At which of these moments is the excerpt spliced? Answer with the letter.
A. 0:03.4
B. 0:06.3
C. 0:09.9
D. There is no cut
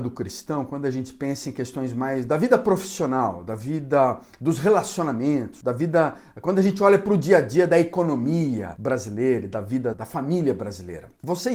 C